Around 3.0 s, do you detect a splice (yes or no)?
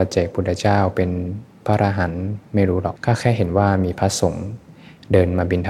yes